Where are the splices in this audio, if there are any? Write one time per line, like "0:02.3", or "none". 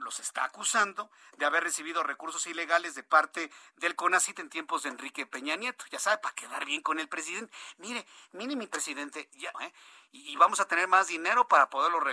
0:09.5

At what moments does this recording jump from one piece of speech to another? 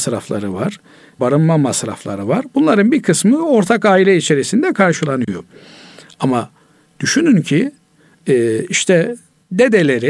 0:01.2

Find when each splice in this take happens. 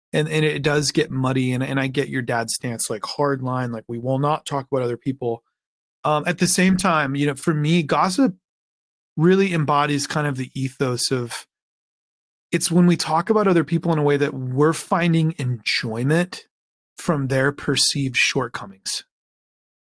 none

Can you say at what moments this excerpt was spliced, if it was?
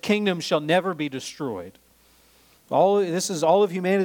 0:02.5

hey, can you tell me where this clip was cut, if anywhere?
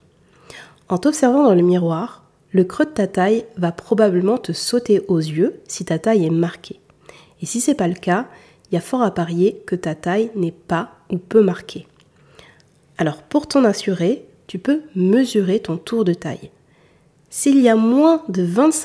none

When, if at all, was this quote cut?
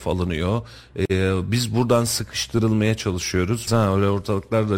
0:03.7

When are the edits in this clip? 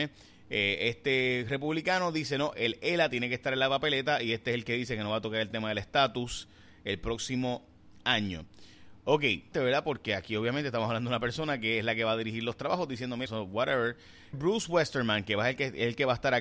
0:09.5
0:13.3
0:14.3

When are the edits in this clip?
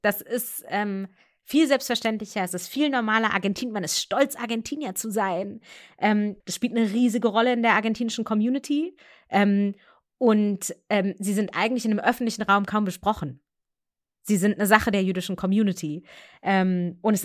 0:06.4

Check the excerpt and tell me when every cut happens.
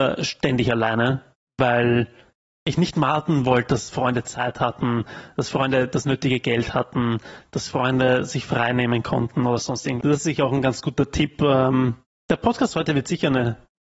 0:12.1

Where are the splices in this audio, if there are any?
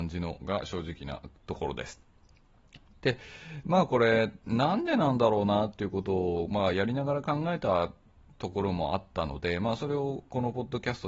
none

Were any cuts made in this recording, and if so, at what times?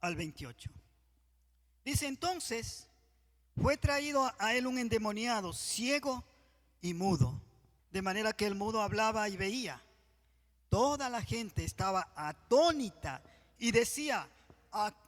0:07.8

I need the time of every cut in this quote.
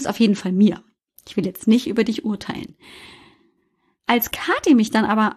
none

